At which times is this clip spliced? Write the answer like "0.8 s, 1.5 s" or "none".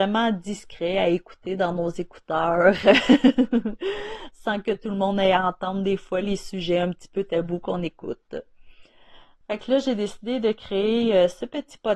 9.4 s